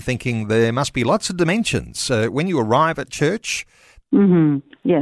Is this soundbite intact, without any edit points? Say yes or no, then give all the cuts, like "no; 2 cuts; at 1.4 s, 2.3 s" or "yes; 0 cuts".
no; 1 cut; at 4.0 s